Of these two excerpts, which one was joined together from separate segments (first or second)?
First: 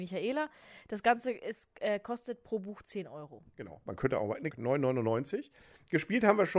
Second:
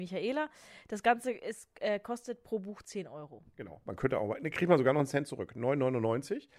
first